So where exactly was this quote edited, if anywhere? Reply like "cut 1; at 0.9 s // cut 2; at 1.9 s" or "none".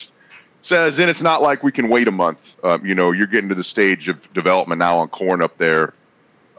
none